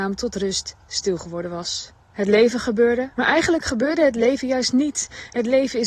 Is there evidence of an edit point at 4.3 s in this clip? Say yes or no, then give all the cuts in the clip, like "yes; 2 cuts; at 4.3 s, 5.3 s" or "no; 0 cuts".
no; 2 cuts; at 2.1 s, 3.1 s